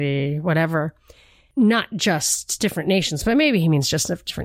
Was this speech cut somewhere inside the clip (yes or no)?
no